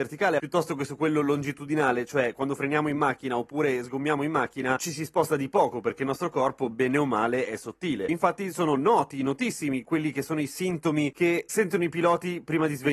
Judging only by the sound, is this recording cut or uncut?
cut